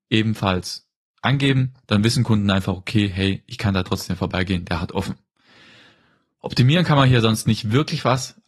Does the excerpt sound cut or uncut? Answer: uncut